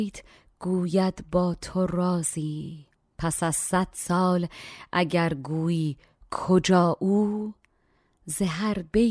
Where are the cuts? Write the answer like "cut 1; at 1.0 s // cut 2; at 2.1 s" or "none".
none